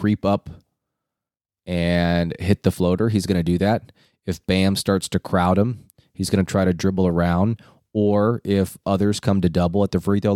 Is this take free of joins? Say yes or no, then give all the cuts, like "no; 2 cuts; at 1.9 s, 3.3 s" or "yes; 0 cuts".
yes; 0 cuts